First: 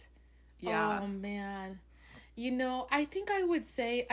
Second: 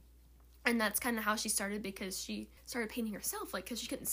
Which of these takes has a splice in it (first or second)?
second